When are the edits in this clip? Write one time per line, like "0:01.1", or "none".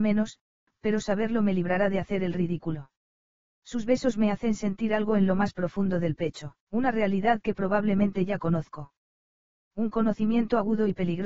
0:03.4
0:06.6